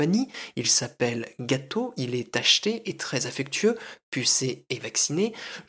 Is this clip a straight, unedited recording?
yes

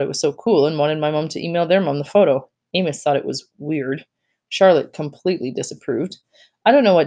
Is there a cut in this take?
no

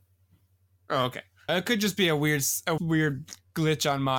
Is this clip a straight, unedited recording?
no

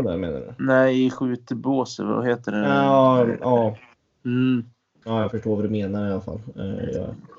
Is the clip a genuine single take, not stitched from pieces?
yes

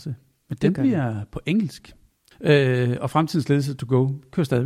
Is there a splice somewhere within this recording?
yes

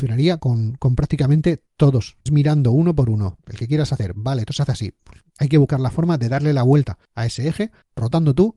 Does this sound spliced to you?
yes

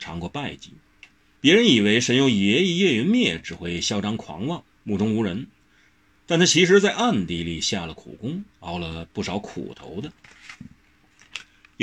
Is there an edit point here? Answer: yes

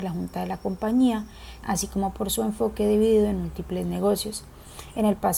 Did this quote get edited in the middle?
yes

